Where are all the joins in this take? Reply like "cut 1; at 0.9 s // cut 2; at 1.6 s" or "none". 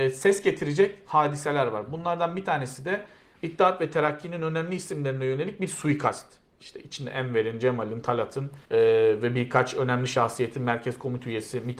cut 1; at 8.6 s

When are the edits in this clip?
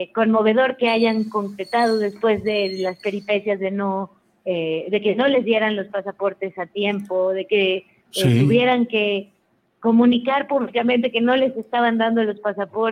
none

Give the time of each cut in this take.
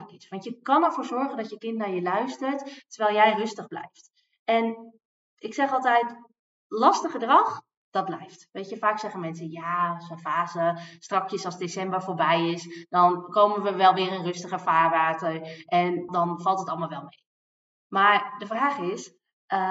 cut 1; at 16.1 s

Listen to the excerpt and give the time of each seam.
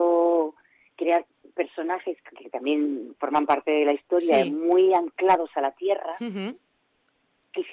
cut 1; at 2.3 s

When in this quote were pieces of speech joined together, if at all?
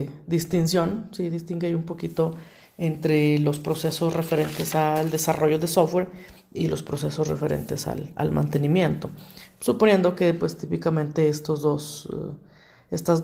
none

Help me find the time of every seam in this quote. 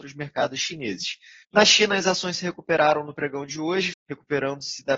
cut 1; at 1.4 s // cut 2; at 3.9 s

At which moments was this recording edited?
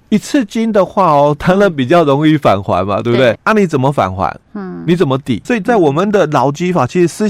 cut 1; at 3.4 s // cut 2; at 5.4 s

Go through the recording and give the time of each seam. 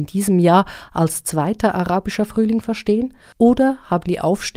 none

